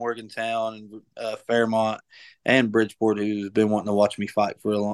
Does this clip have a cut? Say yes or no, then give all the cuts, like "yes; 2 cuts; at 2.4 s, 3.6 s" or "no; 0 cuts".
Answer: no; 0 cuts